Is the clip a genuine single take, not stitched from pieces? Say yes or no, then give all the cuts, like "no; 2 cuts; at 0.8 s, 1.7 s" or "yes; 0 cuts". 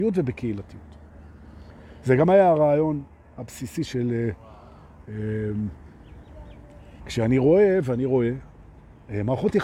no; 1 cut; at 7.0 s